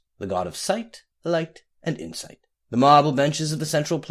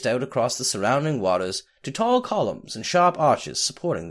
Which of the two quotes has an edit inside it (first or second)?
first